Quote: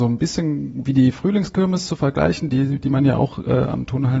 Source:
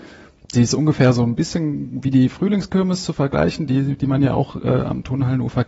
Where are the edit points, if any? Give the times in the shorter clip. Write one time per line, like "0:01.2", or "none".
none